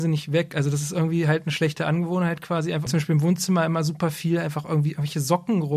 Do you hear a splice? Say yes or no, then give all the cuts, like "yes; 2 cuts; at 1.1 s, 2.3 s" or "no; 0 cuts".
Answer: yes; 1 cut; at 2.9 s